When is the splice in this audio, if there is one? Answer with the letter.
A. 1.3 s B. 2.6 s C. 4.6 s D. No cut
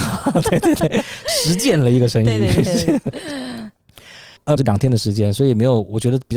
C